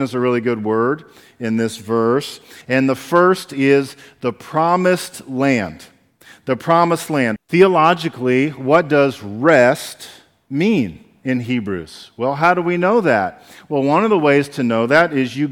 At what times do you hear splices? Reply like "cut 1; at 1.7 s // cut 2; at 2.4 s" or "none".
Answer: cut 1; at 2.6 s // cut 2; at 7.4 s